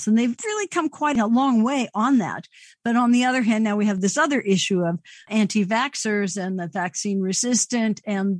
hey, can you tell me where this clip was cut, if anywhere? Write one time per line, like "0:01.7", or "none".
none